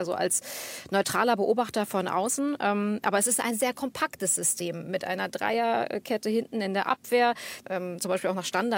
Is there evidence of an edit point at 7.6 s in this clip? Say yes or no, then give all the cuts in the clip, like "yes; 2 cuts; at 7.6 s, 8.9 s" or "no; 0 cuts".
yes; 1 cut; at 7.6 s